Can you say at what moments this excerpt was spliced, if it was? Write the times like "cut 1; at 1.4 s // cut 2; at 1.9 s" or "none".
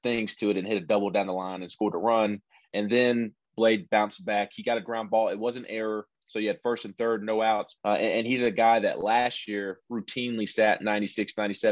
cut 1; at 7.8 s